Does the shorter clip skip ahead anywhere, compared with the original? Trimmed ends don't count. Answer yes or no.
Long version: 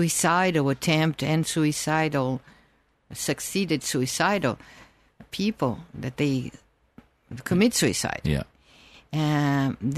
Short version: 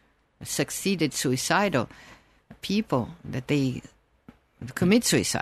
no